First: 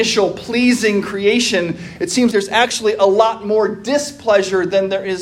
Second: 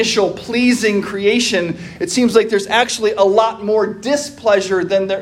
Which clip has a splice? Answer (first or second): first